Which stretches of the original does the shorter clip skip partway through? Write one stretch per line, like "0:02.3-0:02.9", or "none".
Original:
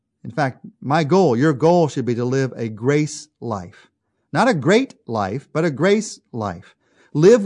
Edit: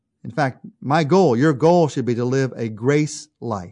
none